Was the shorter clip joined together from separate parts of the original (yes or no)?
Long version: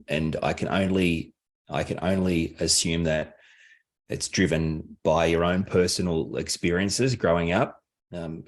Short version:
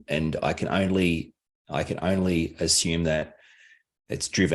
no